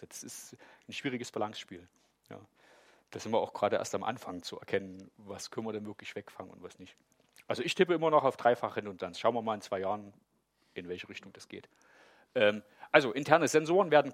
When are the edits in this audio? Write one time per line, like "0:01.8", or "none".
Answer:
none